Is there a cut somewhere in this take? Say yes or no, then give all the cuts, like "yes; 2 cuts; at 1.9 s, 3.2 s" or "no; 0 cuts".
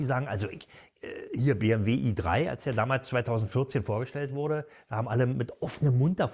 no; 0 cuts